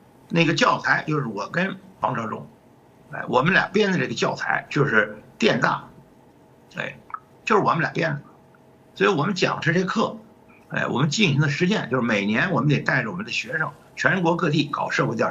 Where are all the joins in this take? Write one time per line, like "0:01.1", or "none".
0:07.3